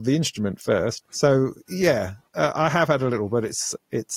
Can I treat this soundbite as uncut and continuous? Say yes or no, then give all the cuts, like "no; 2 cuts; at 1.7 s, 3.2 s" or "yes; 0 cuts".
no; 1 cut; at 1.1 s